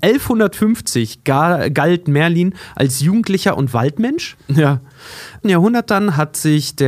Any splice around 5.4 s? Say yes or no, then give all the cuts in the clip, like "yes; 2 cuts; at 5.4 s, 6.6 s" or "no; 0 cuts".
yes; 2 cuts; at 4.4 s, 5.4 s